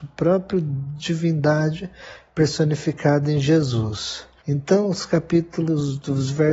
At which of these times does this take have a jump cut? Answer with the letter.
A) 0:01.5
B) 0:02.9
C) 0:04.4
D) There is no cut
C